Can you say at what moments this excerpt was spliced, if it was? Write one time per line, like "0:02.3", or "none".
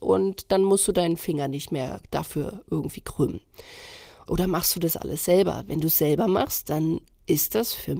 0:04.3